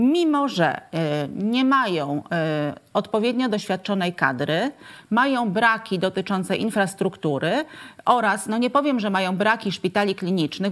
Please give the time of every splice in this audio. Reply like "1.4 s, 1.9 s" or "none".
none